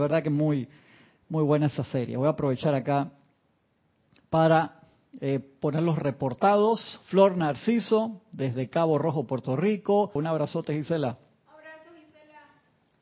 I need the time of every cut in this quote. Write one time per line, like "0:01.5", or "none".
0:10.2